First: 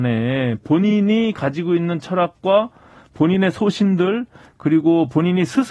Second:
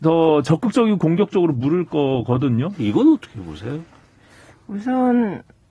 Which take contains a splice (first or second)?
second